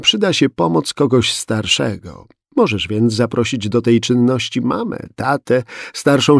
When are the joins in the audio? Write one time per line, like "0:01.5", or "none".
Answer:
none